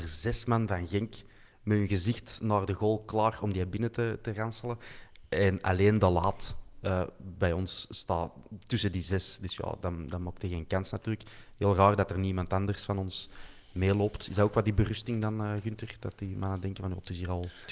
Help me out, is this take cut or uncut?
uncut